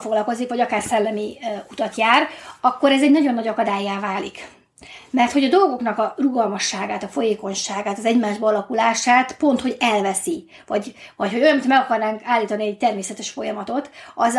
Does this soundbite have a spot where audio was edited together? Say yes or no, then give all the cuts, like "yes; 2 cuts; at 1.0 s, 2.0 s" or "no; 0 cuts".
no; 0 cuts